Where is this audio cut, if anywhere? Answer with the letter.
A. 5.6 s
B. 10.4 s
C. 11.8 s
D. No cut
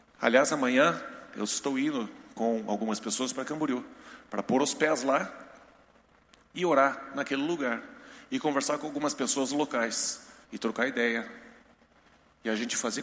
B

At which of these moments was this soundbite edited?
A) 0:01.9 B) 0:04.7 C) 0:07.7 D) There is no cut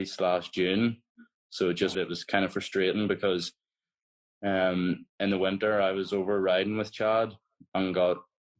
A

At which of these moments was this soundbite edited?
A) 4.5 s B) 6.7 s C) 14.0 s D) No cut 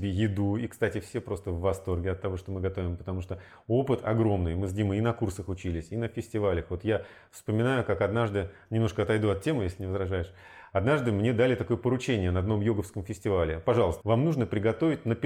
C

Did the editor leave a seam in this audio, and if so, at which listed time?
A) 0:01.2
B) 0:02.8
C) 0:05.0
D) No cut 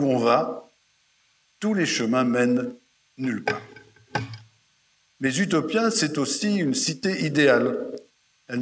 C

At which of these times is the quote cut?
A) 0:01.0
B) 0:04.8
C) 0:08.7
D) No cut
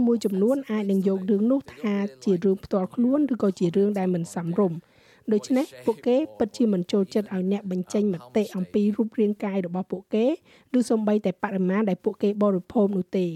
D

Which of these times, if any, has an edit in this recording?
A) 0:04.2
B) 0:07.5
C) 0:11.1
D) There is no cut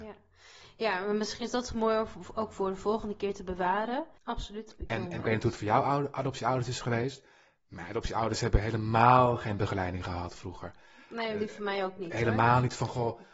A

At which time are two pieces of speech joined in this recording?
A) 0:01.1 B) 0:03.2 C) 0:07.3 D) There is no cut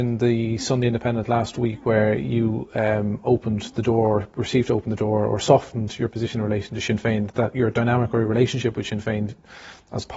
C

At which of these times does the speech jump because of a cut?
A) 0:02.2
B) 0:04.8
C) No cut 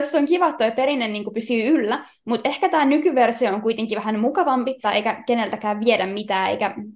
B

